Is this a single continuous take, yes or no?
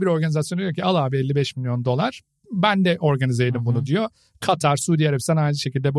yes